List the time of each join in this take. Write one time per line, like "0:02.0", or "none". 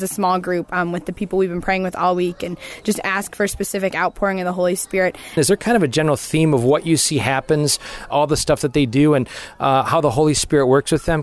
0:05.4
0:08.1